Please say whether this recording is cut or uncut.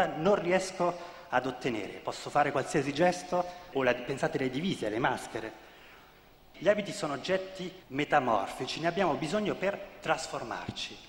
cut